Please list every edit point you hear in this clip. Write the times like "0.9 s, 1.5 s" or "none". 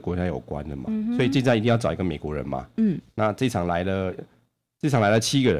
2.7 s